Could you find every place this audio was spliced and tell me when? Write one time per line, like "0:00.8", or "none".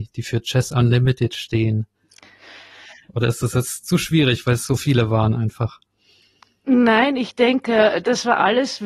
none